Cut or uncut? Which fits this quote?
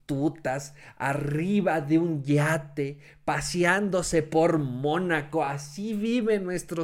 uncut